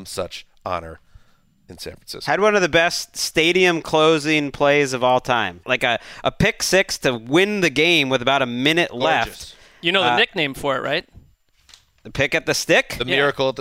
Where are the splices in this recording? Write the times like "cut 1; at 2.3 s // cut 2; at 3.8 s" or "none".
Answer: cut 1; at 5.6 s